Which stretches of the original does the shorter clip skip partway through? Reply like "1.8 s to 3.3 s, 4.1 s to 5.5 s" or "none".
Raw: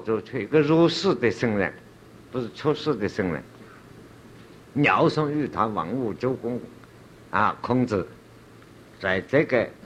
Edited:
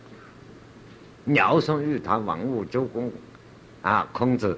none